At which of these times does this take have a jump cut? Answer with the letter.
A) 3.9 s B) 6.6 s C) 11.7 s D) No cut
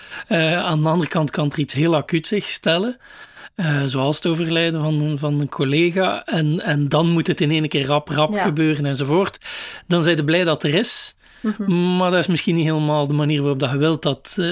D